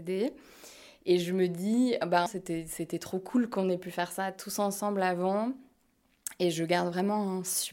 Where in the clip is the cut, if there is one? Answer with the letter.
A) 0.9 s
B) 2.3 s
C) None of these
B